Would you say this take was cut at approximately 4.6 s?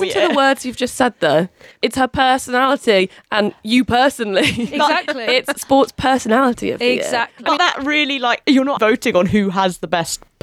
no; 2 cuts; at 7.6 s, 8.8 s

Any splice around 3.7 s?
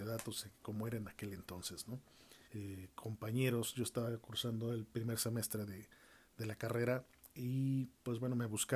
no; 1 cut; at 2.5 s

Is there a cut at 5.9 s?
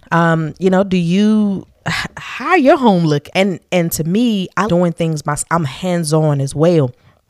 no; 2 cuts; at 3.3 s, 4.7 s

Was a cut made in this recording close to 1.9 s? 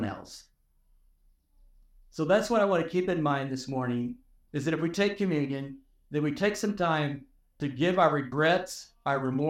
no; 0 cuts

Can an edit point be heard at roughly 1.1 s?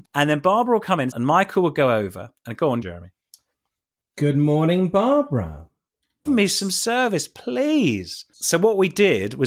yes; 3 cuts; at 1.1 s, 2.8 s, 6.3 s

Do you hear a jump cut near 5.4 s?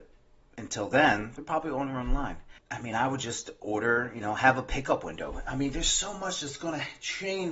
no; 1 cut; at 2.6 s

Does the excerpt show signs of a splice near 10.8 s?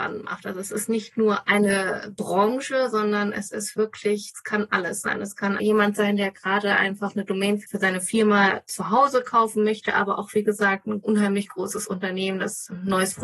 no; 0 cuts

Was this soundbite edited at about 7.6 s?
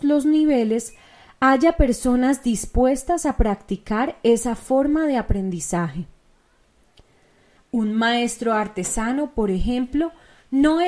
yes; 1 cut; at 7.6 s

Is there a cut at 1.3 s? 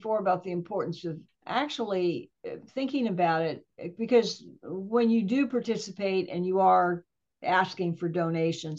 yes; 1 cut; at 1.3 s

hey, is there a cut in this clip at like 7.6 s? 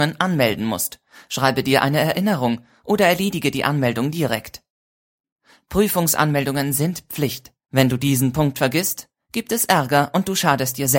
yes; 1 cut; at 7.6 s

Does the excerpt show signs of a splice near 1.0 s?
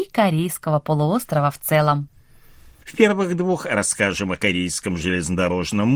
no; 1 cut; at 2.8 s

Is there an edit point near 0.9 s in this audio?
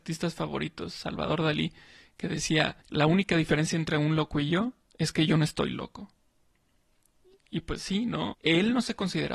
no; 2 cuts; at 2.8 s, 8.3 s

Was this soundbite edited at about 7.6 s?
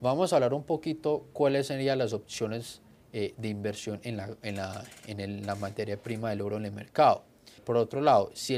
yes; 1 cut; at 7.6 s

